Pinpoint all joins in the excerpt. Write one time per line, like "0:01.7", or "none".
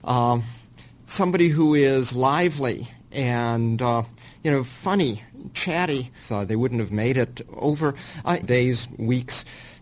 0:06.2
0:08.4